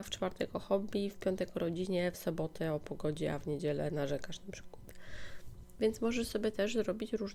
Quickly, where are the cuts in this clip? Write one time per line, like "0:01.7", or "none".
none